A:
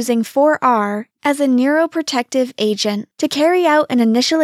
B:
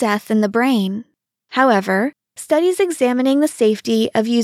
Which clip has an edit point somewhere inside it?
A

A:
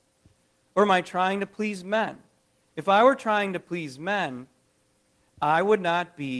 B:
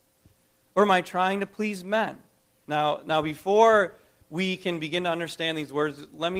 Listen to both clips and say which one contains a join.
B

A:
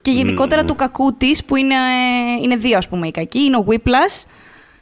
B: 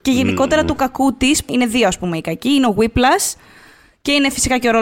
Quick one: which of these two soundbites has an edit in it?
B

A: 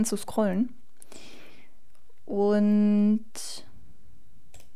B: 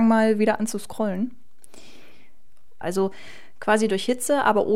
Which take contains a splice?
B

